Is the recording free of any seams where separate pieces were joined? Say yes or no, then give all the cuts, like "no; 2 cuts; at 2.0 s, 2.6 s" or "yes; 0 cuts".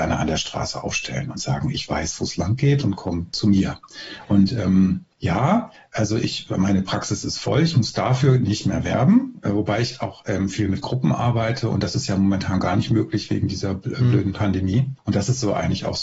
no; 2 cuts; at 5.1 s, 15.0 s